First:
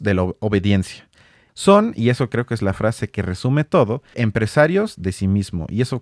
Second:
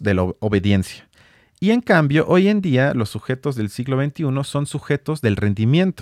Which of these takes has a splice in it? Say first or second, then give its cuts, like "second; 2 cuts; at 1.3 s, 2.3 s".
first; 2 cuts; at 1.5 s, 4.1 s